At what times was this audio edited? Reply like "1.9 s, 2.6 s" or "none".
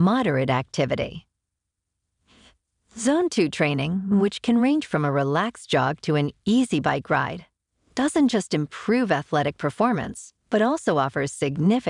none